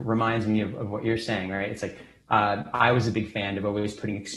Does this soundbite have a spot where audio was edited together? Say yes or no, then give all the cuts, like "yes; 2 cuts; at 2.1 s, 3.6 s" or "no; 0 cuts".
yes; 1 cut; at 2.7 s